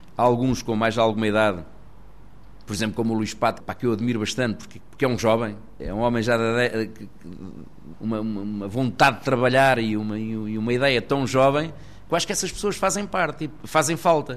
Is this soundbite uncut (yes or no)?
no